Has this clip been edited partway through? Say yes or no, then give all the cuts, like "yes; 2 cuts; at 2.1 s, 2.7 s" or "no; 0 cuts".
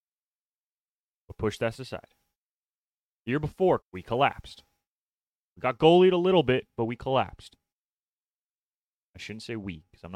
yes; 1 cut; at 3.8 s